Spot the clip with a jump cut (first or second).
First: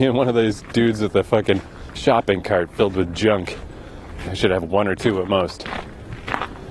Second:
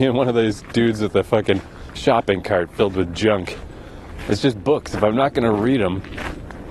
first